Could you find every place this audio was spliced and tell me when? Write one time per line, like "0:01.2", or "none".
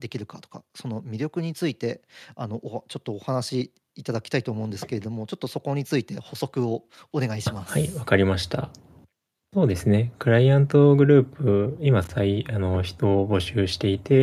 none